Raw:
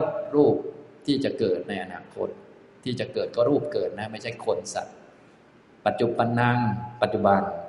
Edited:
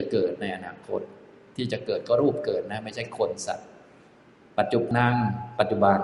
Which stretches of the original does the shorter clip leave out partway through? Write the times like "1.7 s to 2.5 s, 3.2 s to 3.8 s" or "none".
6.2 s to 6.3 s

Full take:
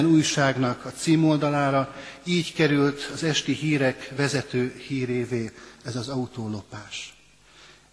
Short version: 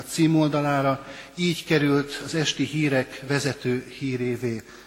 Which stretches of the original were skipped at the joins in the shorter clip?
none

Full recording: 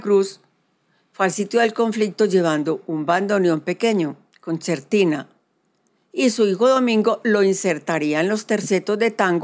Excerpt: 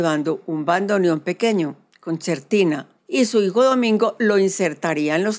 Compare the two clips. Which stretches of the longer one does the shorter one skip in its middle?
5.4 s to 6.0 s

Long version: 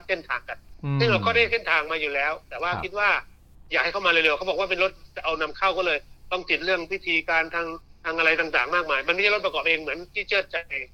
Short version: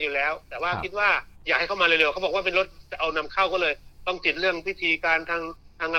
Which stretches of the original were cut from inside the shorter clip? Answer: 3.3 s to 3.6 s

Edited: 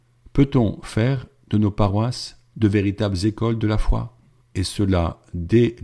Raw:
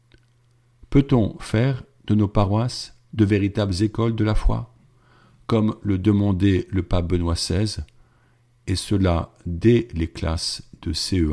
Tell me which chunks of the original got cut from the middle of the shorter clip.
5.0 s to 8.5 s

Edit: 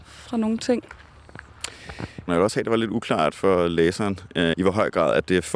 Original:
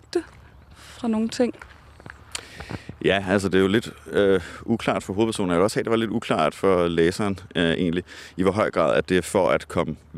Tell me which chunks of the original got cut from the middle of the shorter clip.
3.0 s to 5.5 s, 7.7 s to 8.3 s

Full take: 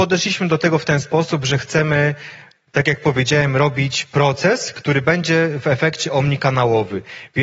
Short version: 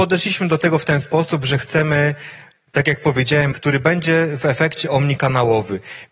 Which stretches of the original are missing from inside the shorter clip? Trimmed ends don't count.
3.5 s to 4.7 s

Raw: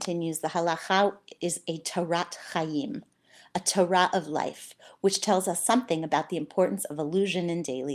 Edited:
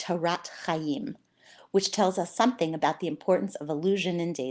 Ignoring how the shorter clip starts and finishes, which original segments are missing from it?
3.5 s to 4.9 s

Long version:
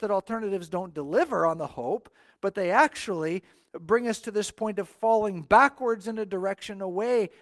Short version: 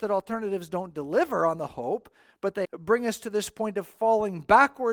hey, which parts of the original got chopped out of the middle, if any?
2.6 s to 3.7 s

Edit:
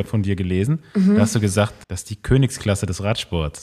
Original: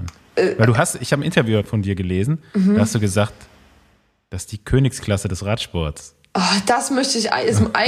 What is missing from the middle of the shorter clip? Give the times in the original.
3.4 s to 4.3 s

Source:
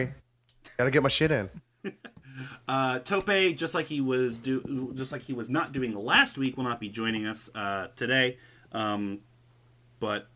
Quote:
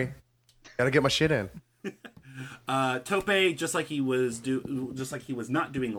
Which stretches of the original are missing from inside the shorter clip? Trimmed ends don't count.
none

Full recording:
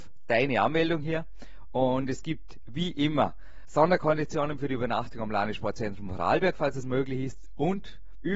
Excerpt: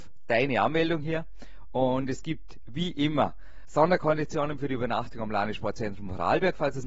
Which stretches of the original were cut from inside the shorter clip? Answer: none

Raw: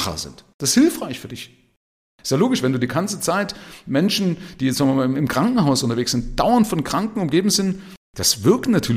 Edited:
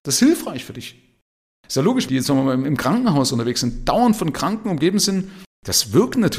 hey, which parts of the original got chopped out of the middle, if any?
2.6 s to 4.6 s

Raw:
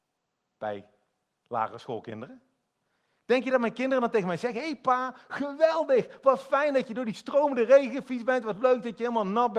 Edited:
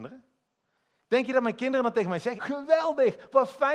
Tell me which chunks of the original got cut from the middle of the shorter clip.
4.5 s to 5.3 s

